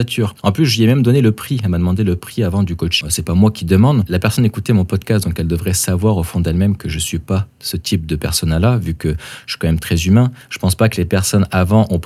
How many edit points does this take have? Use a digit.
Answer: 1